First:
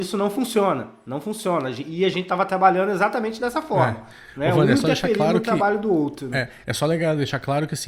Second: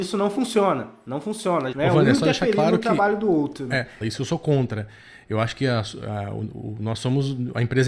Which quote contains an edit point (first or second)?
second